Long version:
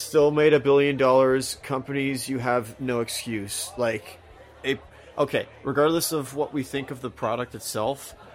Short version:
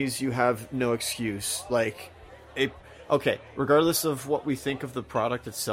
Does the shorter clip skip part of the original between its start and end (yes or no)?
no